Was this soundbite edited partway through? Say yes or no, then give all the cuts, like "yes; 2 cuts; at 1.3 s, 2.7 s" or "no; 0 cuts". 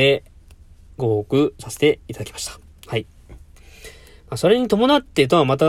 no; 0 cuts